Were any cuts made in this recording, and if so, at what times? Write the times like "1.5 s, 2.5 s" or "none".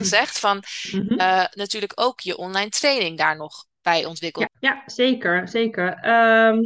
4.5 s